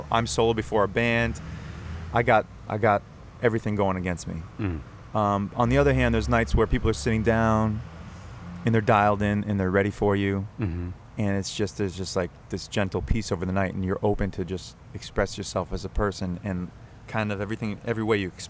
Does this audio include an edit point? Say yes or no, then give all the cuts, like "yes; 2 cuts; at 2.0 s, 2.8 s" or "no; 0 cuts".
no; 0 cuts